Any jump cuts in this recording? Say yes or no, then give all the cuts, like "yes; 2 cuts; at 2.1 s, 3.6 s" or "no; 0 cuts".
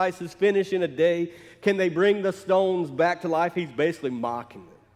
no; 0 cuts